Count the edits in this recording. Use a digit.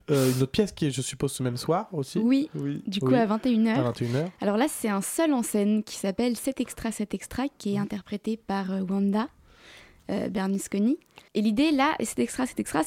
1